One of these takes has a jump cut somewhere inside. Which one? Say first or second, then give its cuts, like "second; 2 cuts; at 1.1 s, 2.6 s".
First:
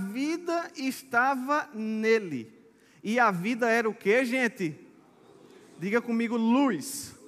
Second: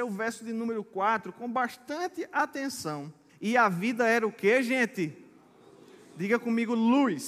second; 1 cut; at 3.3 s